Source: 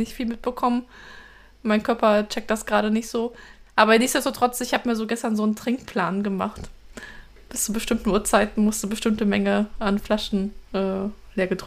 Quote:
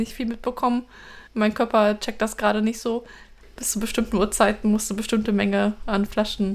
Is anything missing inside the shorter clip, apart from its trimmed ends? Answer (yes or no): yes